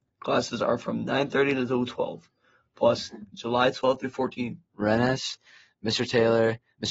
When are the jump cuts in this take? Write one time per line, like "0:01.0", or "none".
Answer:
0:03.3
0:04.7